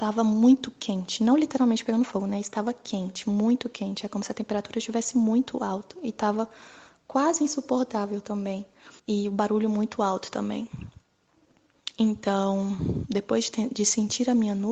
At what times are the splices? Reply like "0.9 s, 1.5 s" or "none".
9.0 s